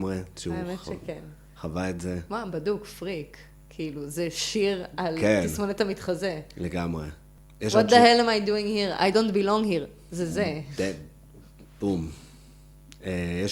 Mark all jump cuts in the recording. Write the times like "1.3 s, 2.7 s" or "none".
none